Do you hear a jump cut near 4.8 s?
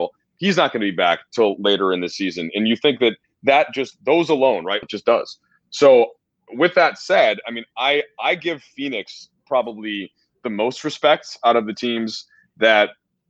yes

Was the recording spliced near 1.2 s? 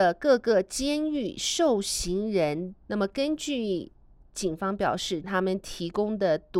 no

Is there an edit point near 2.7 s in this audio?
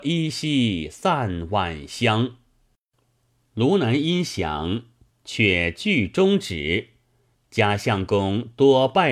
no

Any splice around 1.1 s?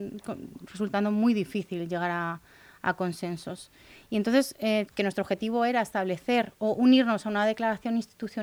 no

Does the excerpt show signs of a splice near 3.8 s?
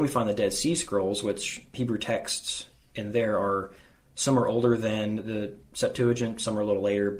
no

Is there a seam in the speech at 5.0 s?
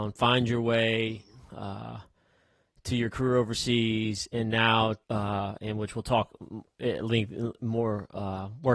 yes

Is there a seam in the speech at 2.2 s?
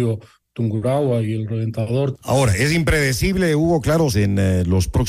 yes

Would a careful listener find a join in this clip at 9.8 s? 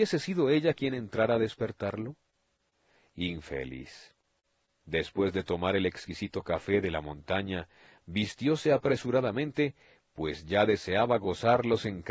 no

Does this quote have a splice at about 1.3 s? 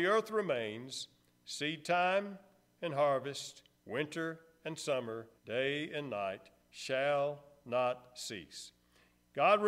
no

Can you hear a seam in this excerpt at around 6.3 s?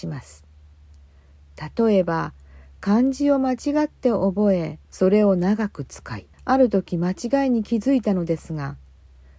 yes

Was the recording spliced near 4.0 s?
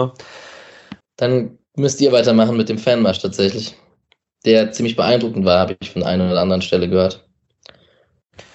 no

